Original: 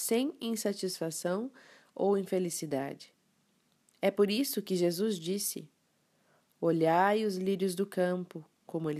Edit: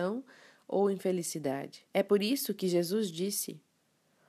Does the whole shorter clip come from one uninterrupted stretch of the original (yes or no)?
no